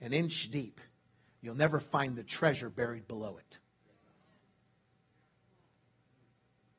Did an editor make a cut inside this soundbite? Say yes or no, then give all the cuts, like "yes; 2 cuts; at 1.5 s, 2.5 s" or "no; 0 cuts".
no; 0 cuts